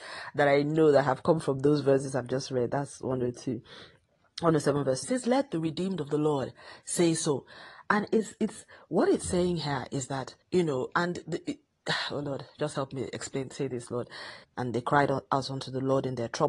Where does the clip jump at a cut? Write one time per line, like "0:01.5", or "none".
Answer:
0:05.0
0:10.4
0:14.4